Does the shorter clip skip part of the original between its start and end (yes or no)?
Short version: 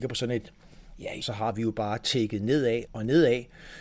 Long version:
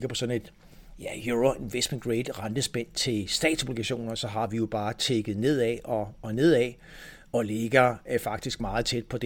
yes